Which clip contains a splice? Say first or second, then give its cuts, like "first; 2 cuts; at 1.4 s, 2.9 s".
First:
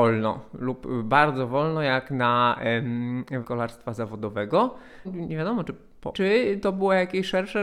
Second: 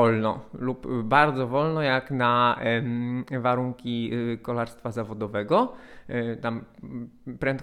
first; 3 cuts; at 3.4 s, 5.0 s, 6.1 s